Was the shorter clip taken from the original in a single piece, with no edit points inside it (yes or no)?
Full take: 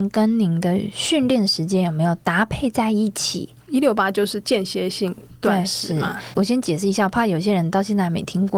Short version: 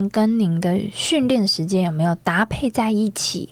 yes